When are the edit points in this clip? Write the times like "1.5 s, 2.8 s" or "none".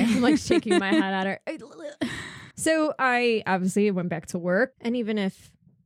2.5 s, 4.8 s